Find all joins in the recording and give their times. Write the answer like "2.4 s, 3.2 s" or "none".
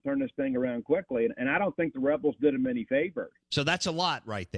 3.4 s

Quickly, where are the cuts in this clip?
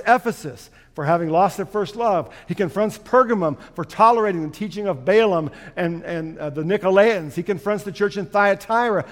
none

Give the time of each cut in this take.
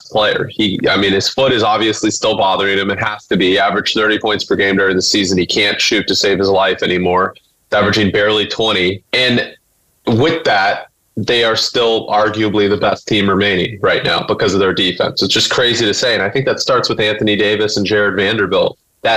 9.0 s

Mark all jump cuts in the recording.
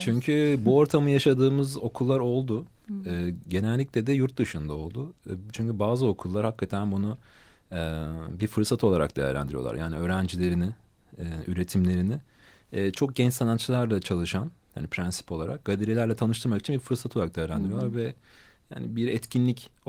none

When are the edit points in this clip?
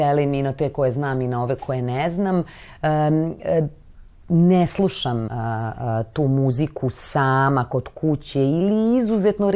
5.3 s

